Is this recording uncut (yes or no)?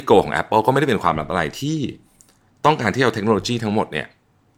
yes